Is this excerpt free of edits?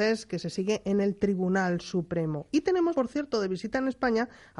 no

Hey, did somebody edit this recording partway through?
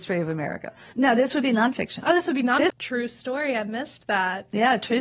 yes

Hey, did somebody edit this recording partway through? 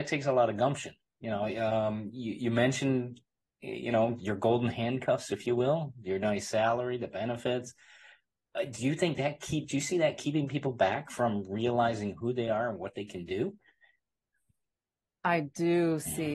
no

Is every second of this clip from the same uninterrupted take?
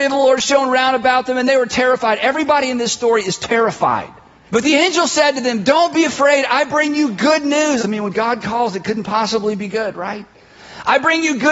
no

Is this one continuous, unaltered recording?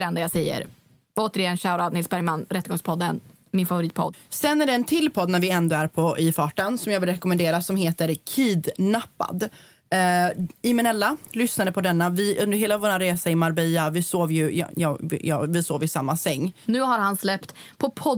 no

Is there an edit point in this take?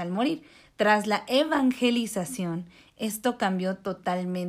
no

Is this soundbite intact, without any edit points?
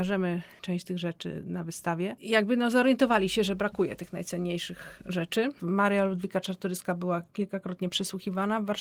yes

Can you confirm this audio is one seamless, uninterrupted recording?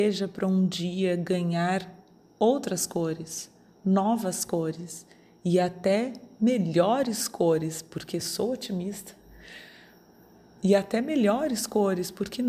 yes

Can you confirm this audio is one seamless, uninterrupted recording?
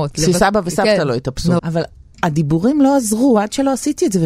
no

